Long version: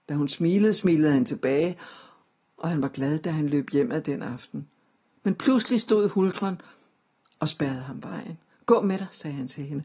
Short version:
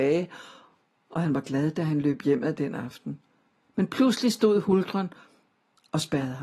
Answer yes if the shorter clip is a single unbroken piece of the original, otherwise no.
yes